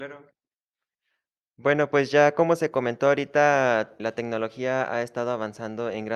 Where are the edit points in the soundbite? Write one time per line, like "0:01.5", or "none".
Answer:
0:04.0